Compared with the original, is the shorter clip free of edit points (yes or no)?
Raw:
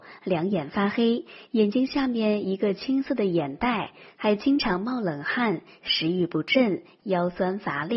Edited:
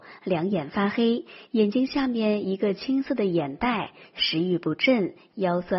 no